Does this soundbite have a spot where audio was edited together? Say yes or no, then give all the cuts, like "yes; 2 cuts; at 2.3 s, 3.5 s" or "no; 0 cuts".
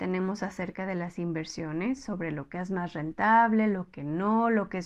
no; 0 cuts